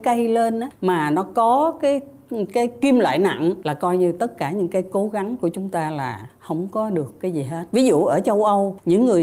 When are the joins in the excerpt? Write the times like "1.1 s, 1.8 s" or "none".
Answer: 7.7 s